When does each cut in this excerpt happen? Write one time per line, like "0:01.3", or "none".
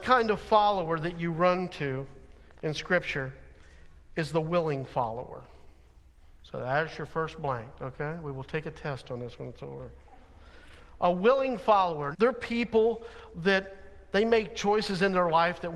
0:12.1